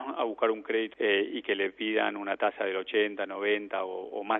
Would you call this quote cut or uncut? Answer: cut